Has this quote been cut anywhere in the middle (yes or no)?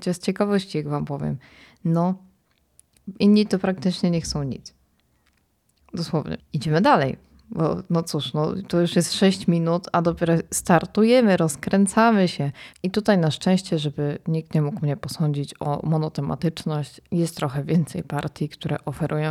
yes